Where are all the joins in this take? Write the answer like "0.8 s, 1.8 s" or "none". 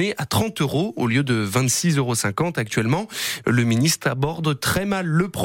3.4 s